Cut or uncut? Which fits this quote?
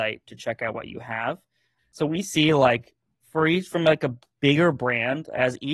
cut